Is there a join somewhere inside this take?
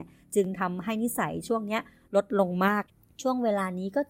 no; 0 cuts

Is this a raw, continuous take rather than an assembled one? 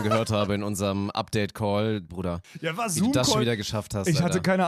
no; 1 cut; at 2.1 s

